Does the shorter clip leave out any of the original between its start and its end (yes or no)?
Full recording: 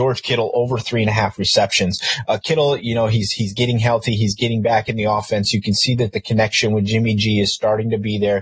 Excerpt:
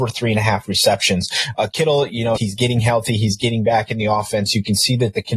yes